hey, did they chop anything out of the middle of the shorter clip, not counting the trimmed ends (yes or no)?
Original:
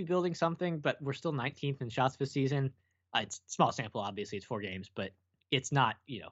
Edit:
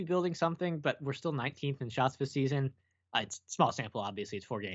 no